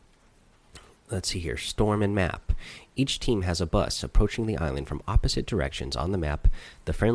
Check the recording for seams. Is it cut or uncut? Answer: uncut